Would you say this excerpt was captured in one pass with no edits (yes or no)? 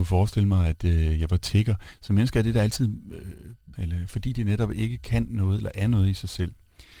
no